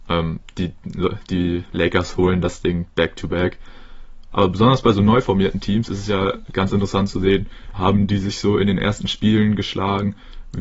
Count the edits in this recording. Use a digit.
2